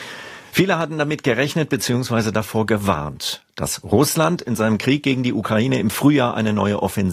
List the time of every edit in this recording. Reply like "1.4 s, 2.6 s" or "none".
none